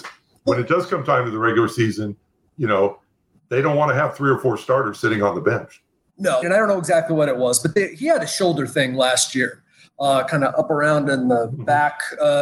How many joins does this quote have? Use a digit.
1